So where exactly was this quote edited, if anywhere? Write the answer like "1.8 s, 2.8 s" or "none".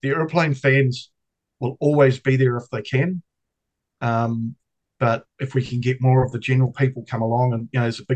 none